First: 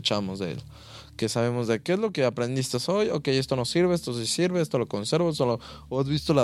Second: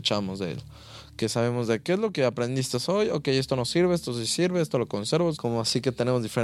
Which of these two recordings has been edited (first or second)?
second